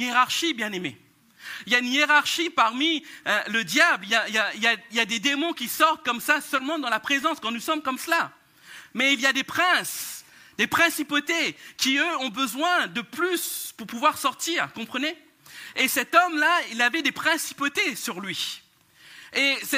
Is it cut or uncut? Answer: uncut